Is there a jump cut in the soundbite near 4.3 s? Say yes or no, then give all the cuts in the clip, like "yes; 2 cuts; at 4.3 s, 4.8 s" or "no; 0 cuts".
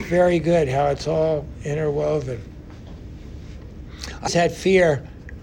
yes; 1 cut; at 4.3 s